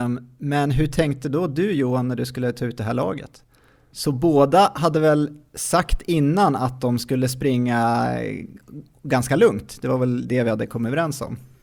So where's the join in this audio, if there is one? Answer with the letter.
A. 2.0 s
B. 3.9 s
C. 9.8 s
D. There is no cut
B